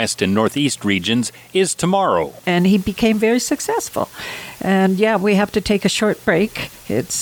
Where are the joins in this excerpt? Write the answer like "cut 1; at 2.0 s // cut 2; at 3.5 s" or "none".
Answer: cut 1; at 2.4 s

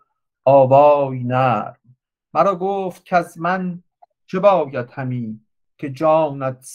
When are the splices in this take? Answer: none

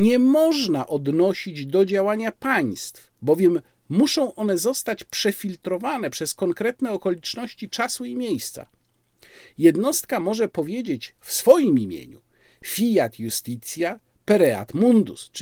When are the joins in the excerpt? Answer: none

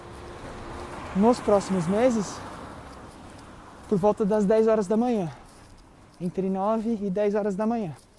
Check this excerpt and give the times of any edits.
none

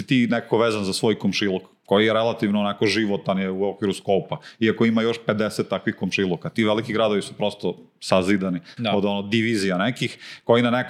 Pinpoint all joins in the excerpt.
cut 1; at 8.8 s

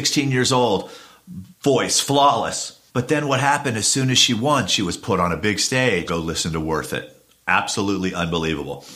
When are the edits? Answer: cut 1; at 1.5 s // cut 2; at 2.9 s // cut 3; at 6.1 s

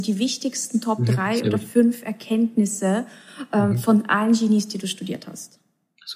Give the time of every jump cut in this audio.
none

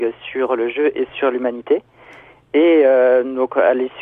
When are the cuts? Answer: none

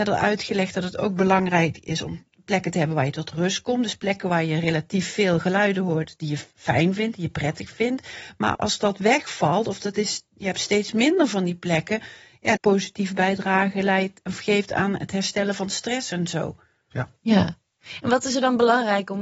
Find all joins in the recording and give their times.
cut 1; at 8.5 s // cut 2; at 12.6 s // cut 3; at 16.9 s

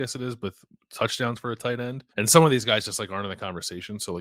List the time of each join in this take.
cut 1; at 2.1 s

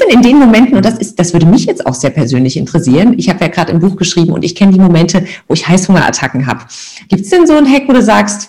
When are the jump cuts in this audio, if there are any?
cut 1; at 7.1 s

